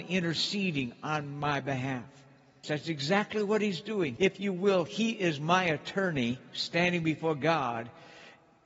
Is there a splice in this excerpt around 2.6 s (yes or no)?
yes